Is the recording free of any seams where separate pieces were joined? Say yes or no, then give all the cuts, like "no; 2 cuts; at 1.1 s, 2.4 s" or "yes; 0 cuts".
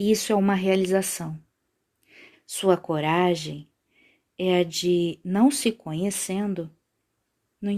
no; 1 cut; at 2.3 s